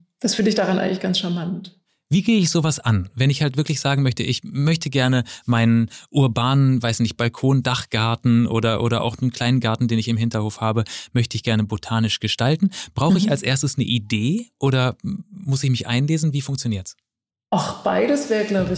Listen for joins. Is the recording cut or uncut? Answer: uncut